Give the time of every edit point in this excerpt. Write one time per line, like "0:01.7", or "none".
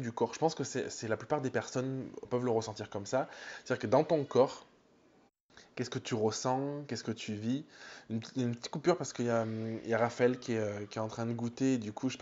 0:02.2